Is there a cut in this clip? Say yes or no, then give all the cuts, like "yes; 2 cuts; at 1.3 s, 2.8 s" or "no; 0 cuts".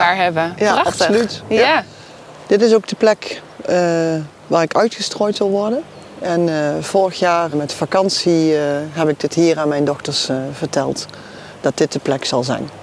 yes; 1 cut; at 7.5 s